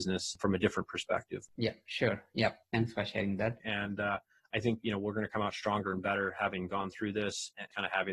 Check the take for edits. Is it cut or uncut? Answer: cut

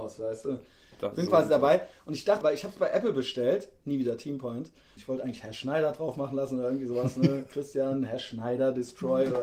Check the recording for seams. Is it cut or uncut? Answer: cut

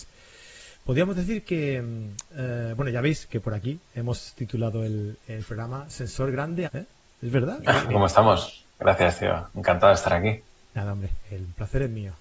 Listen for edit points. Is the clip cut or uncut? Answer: cut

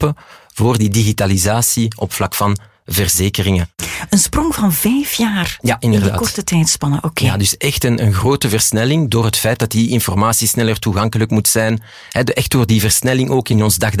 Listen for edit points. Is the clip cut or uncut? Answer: uncut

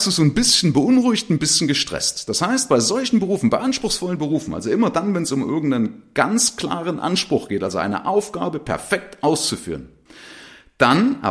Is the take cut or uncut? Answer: uncut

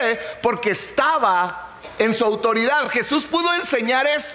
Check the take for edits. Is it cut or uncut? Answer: uncut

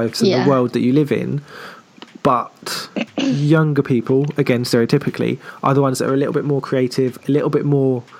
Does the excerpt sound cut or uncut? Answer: uncut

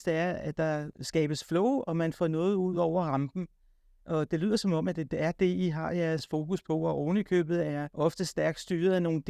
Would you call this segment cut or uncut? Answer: uncut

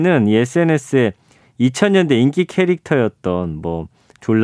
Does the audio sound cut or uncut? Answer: uncut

